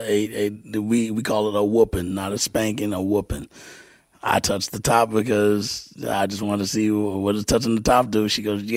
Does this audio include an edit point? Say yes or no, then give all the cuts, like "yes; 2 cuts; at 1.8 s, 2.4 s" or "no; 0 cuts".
no; 0 cuts